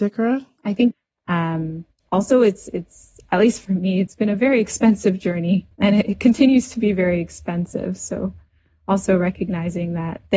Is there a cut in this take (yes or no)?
no